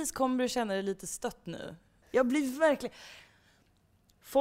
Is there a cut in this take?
yes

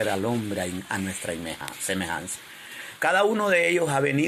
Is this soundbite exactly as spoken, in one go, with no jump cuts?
no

